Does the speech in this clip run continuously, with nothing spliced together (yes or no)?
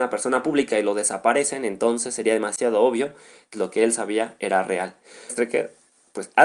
no